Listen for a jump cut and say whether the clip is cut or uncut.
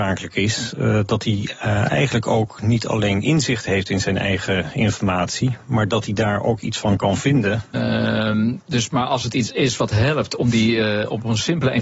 cut